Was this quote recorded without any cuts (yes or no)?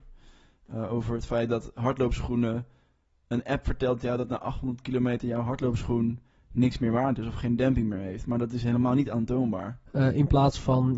no